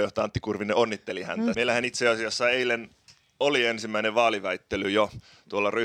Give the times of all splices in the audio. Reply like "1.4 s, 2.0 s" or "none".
1.5 s